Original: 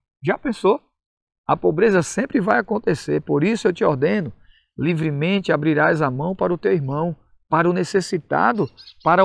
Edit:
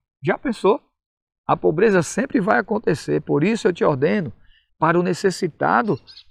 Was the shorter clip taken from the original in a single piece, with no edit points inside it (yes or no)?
no